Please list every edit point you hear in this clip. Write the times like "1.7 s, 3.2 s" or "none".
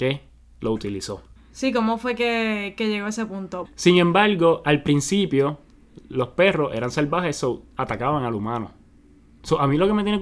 1.4 s, 3.6 s